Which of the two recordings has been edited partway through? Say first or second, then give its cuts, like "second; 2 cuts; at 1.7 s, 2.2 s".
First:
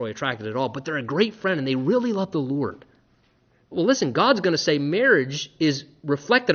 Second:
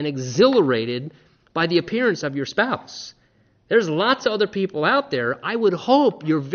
first; 1 cut; at 3.7 s